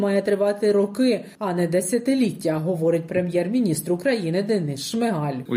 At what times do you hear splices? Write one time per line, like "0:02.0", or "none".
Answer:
none

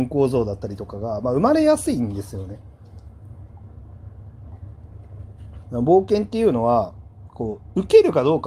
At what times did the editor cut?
0:05.6

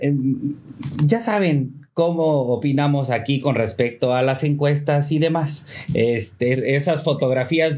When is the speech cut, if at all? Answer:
0:06.5

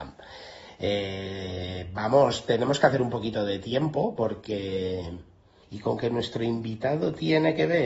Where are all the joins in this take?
0:05.6

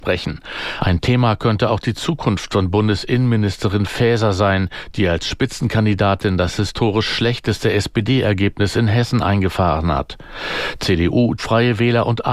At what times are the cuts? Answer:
0:11.4

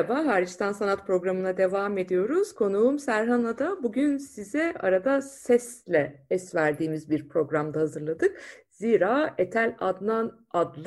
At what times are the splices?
none

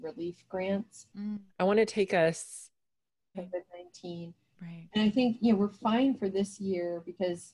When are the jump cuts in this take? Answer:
0:01.5
0:03.3

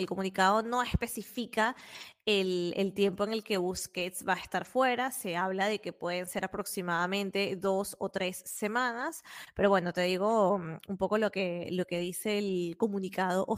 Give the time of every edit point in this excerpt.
none

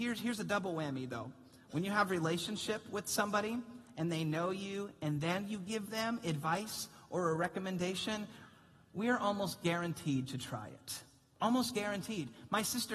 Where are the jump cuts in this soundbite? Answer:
none

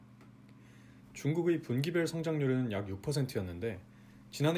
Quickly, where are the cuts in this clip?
0:01.0

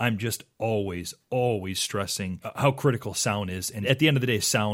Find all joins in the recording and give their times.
none

